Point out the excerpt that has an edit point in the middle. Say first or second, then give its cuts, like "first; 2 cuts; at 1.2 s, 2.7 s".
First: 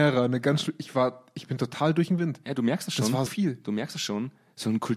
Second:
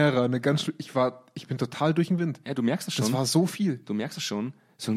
first; 1 cut; at 3.3 s